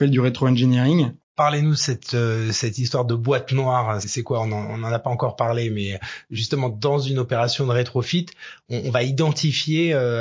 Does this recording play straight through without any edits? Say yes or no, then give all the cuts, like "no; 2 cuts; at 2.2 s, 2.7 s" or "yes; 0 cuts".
no; 1 cut; at 1.2 s